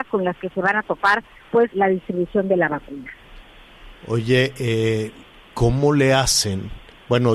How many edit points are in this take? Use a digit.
1